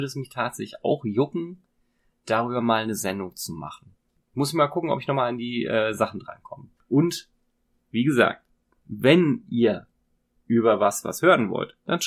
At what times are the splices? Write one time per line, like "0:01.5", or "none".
0:04.2
0:06.8